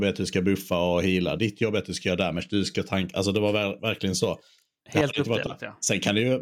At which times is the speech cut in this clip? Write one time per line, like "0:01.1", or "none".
none